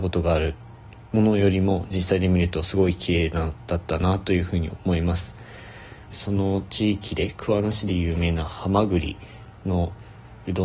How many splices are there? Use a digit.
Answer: 1